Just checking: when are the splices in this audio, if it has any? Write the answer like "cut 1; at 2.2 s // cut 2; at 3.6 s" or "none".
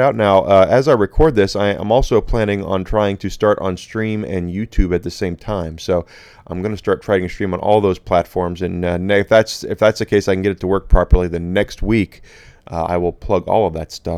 none

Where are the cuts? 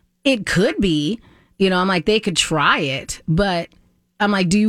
none

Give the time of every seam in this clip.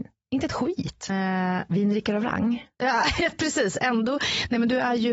cut 1; at 1.1 s

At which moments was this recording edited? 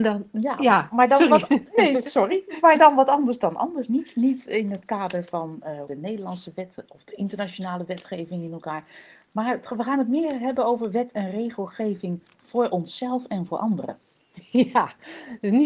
cut 1; at 5.9 s

